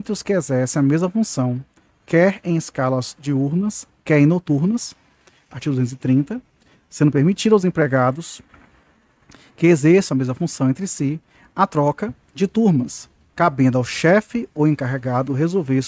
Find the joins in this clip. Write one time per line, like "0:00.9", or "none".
0:05.5
0:13.3